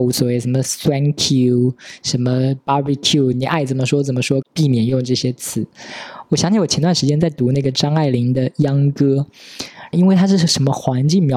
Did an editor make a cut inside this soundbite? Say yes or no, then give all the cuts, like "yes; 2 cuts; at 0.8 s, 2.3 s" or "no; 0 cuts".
yes; 3 cuts; at 3.3 s, 4.4 s, 9.9 s